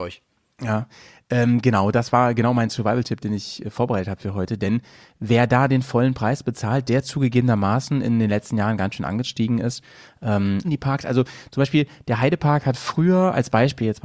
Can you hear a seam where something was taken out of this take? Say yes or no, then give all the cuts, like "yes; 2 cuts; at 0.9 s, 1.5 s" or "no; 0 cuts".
yes; 1 cut; at 10.6 s